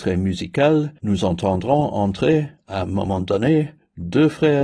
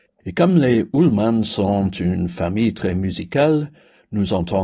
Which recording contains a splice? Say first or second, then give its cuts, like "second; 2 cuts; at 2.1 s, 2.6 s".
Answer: first; 1 cut; at 1.0 s